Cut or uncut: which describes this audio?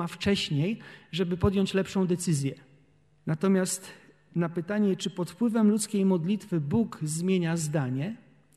cut